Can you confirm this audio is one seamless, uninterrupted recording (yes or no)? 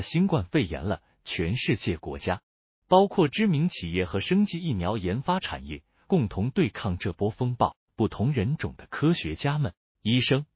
no